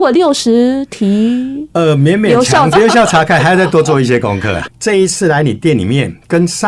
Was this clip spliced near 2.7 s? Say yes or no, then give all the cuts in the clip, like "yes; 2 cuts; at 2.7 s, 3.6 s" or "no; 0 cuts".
yes; 2 cuts; at 2.7 s, 4.7 s